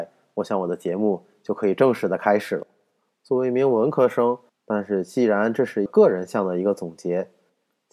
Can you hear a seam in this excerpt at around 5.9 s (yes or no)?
yes